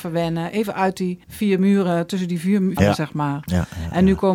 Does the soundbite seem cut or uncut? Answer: cut